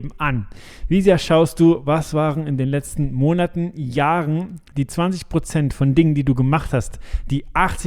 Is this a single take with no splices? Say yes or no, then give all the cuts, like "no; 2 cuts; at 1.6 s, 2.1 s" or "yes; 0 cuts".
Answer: yes; 0 cuts